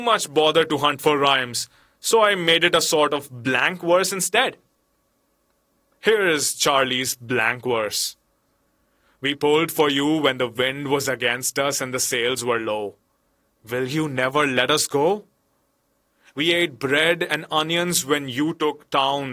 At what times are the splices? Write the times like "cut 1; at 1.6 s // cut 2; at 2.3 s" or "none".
none